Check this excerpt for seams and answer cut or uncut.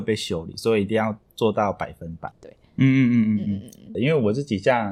cut